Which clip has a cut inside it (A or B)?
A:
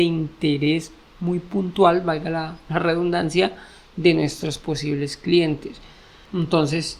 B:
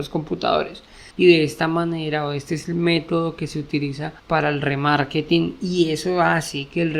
B